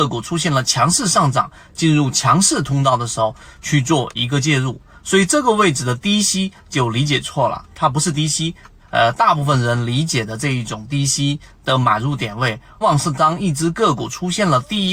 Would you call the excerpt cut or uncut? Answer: cut